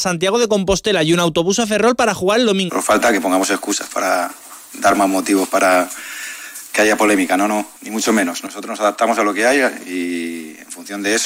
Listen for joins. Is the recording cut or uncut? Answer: cut